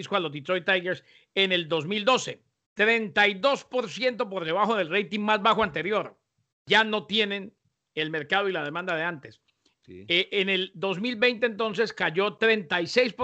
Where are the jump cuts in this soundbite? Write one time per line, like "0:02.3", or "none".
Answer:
0:02.6
0:06.5
0:09.7